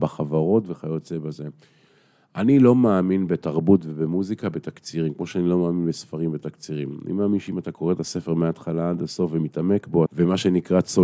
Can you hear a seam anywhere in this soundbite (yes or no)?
yes